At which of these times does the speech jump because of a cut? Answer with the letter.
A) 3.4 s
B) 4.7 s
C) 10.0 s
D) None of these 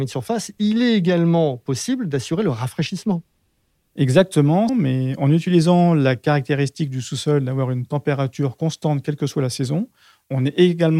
B